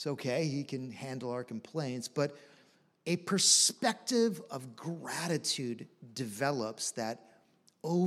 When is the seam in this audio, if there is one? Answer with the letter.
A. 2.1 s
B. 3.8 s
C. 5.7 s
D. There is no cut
D